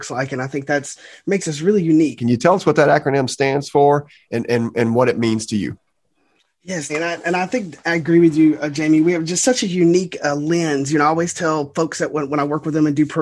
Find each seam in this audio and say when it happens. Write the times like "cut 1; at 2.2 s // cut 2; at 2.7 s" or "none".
cut 1; at 2.2 s // cut 2; at 6.9 s